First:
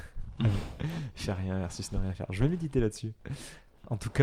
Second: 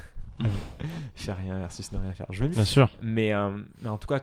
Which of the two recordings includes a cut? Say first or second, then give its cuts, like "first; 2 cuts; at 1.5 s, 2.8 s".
second; 1 cut; at 2.5 s